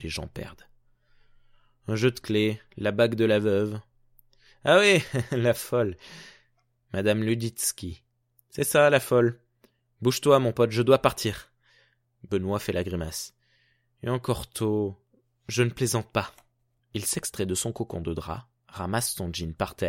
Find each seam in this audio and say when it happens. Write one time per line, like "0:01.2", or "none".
none